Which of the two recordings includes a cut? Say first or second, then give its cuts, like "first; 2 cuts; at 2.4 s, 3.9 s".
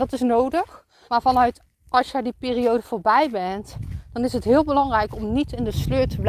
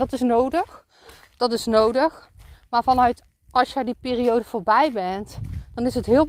first; 1 cut; at 1.0 s